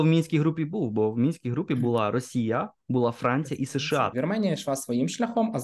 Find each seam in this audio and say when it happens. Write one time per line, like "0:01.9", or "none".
0:04.1